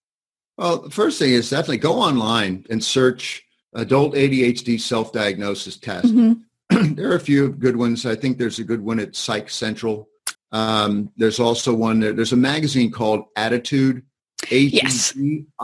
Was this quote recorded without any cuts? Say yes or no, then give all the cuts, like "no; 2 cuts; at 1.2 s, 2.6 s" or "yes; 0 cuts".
no; 1 cut; at 10.3 s